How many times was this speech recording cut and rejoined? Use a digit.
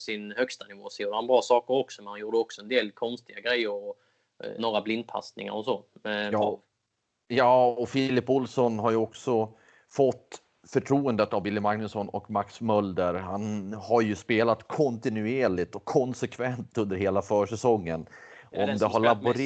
2